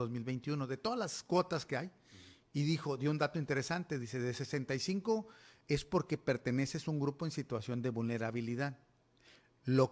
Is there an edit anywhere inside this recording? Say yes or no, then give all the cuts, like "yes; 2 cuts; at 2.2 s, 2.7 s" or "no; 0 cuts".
yes; 1 cut; at 5.6 s